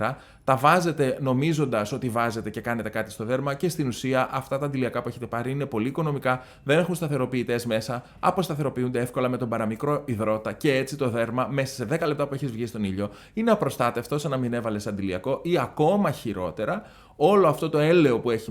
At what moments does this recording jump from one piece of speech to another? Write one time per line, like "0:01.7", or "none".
none